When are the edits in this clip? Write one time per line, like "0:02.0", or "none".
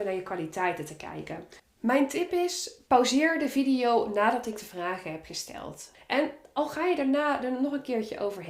0:01.6
0:05.9